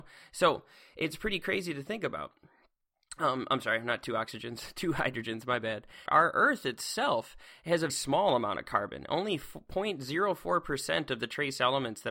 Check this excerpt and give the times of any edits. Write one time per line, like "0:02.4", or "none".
0:06.1
0:07.9